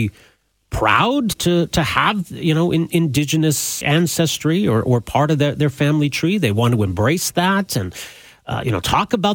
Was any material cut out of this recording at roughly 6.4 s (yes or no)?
no